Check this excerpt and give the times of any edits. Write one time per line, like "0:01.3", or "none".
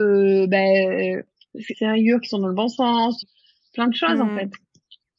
0:01.7
0:03.2

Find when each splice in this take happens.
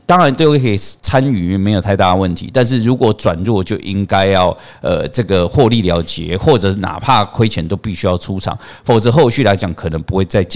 0:01.0

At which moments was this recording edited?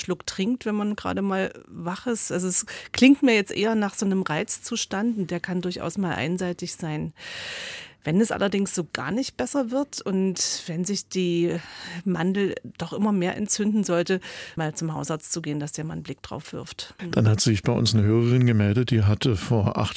0:14.6
0:17.0

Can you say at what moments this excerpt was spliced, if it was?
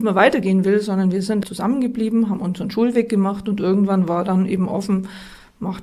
0:01.4

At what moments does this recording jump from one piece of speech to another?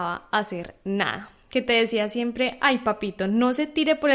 none

